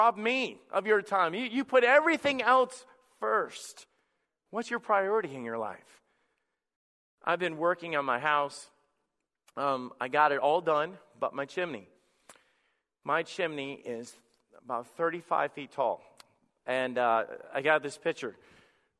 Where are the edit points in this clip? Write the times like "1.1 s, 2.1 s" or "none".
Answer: none